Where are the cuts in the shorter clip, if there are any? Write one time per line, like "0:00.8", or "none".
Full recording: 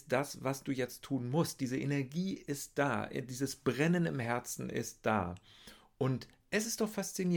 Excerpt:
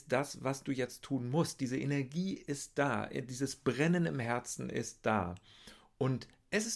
none